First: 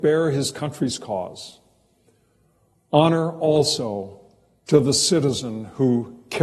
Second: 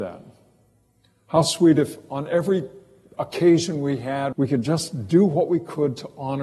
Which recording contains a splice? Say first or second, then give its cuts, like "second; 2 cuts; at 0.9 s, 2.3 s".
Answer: second; 1 cut; at 4.3 s